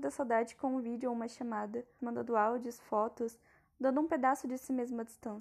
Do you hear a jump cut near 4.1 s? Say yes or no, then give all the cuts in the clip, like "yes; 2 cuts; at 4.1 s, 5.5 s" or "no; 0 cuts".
no; 1 cut; at 2.0 s